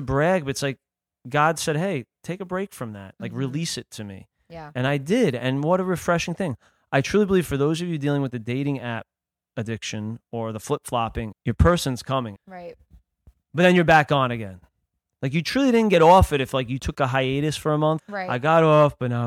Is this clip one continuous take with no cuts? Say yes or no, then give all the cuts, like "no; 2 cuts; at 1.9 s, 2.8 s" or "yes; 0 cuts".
no; 3 cuts; at 11.3 s, 12.4 s, 18.0 s